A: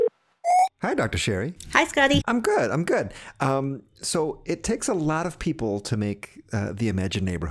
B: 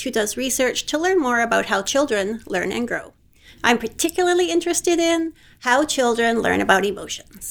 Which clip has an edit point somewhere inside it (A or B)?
A